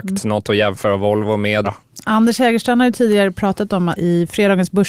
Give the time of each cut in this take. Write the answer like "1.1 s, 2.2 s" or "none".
1.6 s, 4.0 s